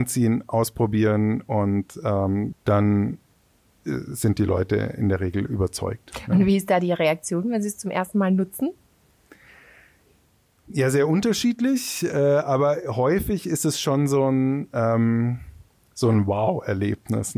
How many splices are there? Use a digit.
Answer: 1